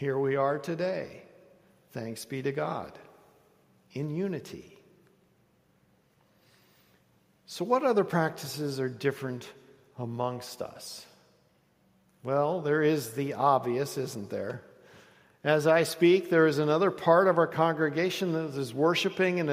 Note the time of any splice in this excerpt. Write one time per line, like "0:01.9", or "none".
none